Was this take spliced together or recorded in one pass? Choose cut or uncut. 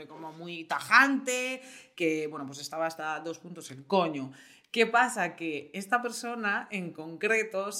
uncut